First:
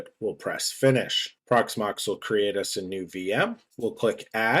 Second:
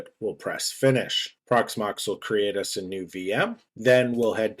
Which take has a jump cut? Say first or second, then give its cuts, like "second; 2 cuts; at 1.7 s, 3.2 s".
first; 1 cut; at 3.7 s